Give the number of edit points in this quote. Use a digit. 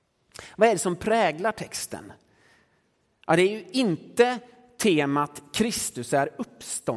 0